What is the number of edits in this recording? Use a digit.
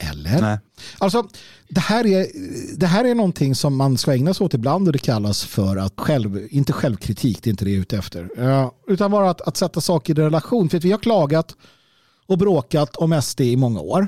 1